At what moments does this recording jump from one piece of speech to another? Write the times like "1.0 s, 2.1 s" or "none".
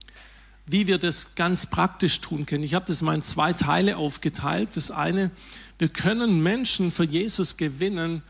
none